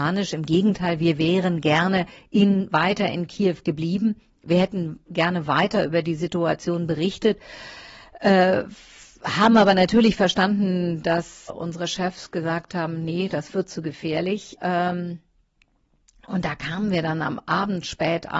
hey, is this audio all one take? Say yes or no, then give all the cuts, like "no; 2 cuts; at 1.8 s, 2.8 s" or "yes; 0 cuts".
no; 2 cuts; at 11.5 s, 14.6 s